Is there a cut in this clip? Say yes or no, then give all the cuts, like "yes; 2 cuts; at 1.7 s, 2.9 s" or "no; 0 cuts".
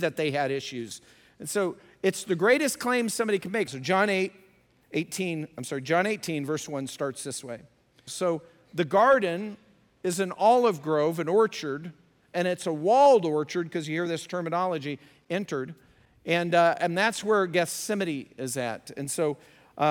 yes; 2 cuts; at 3.7 s, 8.1 s